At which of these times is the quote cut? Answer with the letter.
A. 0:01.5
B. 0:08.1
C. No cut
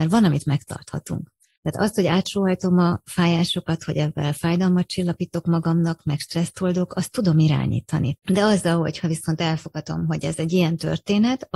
B